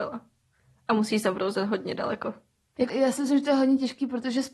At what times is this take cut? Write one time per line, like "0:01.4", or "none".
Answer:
0:02.9